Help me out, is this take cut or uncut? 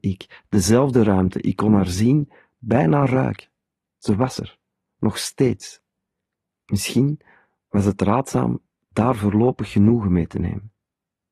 uncut